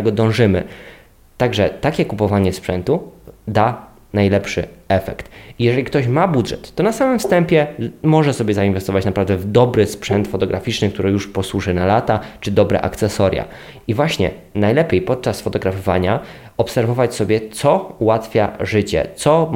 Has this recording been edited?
yes; 1 cut; at 13.8 s

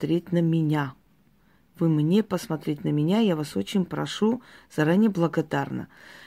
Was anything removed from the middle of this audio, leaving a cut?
no; 0 cuts

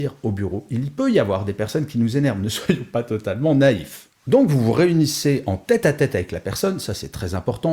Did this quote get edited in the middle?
no; 0 cuts

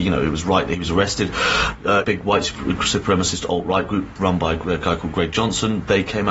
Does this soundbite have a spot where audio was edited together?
yes; 1 cut; at 2.0 s

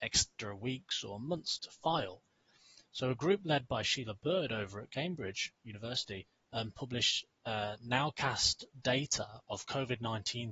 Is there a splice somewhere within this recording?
yes; 1 cut; at 1.6 s

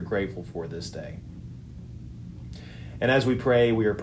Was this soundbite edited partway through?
no; 0 cuts

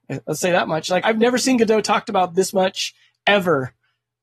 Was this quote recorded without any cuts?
no; 1 cut; at 1.0 s

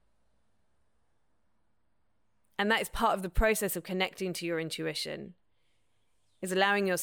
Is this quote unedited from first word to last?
yes; 0 cuts

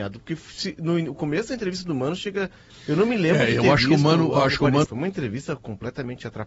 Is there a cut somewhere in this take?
yes; 2 cuts; at 2.7 s, 4.8 s

